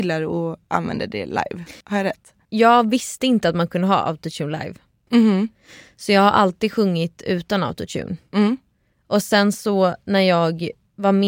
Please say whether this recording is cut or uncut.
cut